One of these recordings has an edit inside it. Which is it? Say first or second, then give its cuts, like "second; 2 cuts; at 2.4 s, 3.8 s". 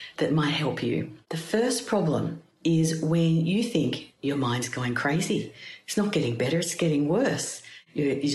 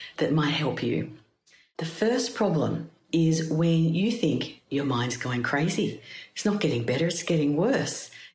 first; 1 cut; at 1.2 s